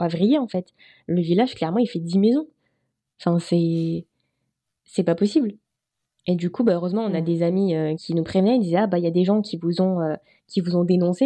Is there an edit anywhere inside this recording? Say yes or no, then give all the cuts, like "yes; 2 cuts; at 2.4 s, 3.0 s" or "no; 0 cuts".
yes; 1 cut; at 8.0 s